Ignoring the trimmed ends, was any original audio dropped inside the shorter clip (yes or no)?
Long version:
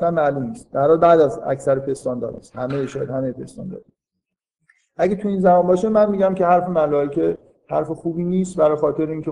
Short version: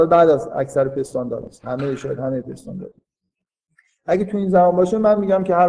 no